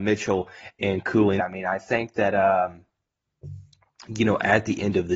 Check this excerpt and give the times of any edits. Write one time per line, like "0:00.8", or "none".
0:01.4